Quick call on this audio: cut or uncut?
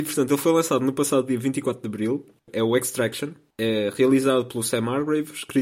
uncut